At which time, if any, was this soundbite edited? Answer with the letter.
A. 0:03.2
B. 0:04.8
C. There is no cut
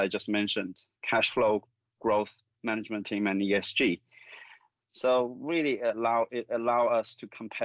B